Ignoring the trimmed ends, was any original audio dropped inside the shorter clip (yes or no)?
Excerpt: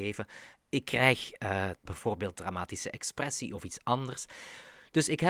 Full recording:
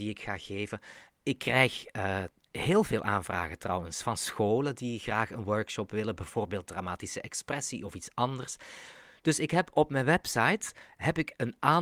yes